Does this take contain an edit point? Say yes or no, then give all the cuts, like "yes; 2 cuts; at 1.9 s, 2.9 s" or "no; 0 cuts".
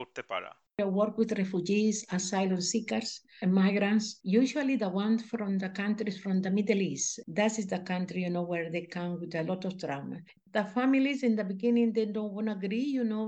no; 0 cuts